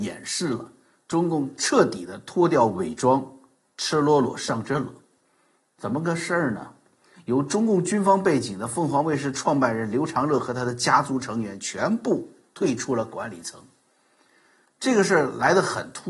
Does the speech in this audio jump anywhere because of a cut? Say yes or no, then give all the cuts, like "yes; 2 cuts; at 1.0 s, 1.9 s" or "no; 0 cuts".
yes; 1 cut; at 7.2 s